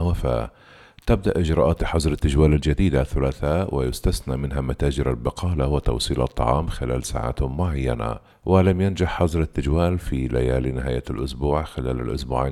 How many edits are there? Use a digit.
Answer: 1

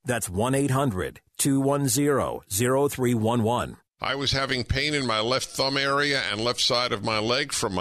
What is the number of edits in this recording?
1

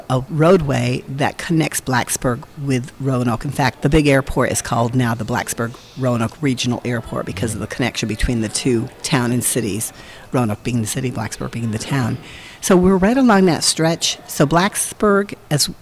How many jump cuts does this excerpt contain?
1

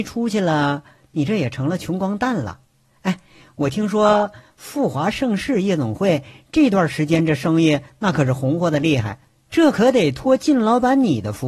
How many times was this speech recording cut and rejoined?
0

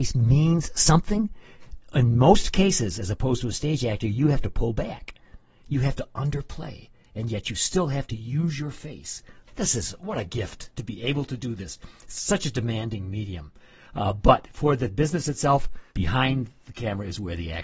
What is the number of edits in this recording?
1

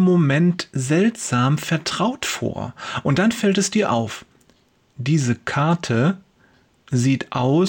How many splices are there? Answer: 0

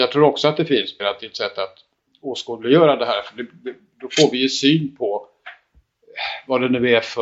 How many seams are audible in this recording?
1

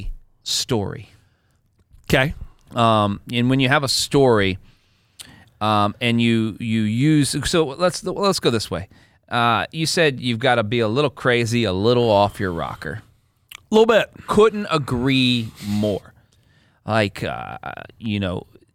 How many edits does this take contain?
0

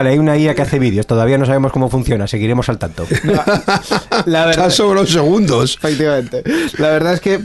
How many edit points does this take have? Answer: 0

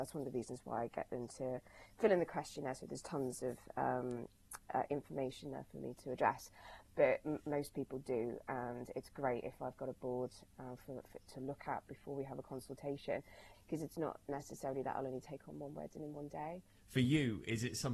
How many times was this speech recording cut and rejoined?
3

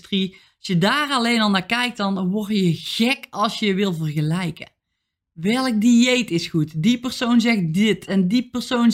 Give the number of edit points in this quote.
0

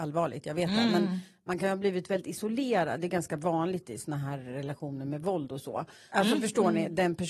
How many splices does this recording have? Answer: 1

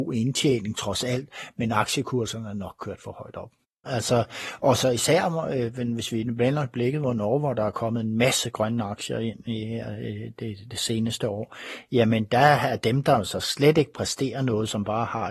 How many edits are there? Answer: 1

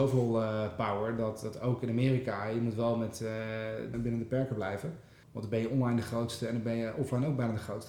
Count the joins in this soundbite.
2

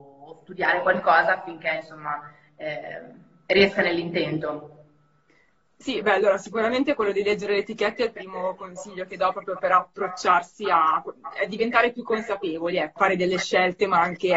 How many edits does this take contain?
1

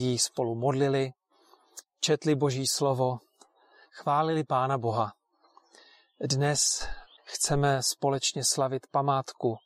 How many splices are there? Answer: 0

